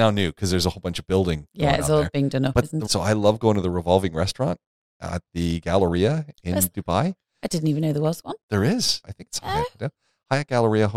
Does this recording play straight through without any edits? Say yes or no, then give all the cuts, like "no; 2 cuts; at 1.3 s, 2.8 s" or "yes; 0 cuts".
no; 2 cuts; at 2.9 s, 9.0 s